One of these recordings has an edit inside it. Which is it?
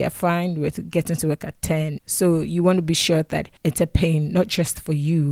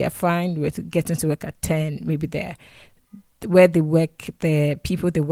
first; 2 cuts; at 2.0 s, 3.6 s

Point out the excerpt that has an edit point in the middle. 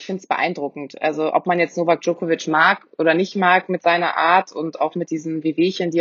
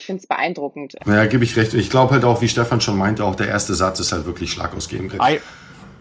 second; 2 cuts; at 1.0 s, 5.1 s

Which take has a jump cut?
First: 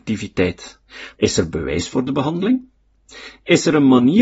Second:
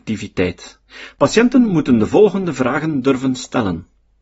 first; 1 cut; at 1.2 s

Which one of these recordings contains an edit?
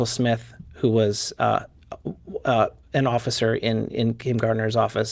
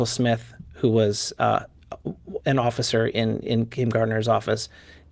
second; 1 cut; at 2.4 s

